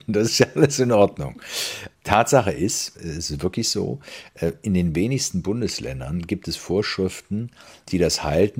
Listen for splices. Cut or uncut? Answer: cut